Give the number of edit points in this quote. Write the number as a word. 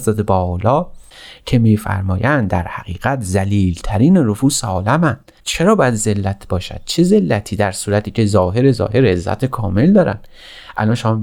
one